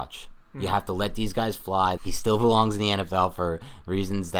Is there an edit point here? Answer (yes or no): yes